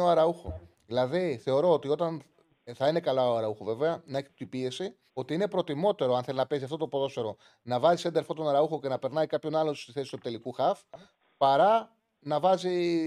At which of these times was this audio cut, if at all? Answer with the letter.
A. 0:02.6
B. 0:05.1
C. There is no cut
B